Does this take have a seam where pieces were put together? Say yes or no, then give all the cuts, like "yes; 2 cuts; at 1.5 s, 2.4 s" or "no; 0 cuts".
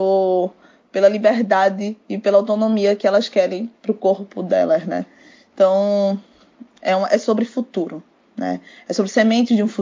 no; 0 cuts